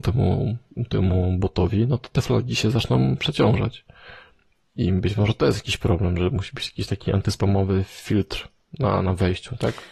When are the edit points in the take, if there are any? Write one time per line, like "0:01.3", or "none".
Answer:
none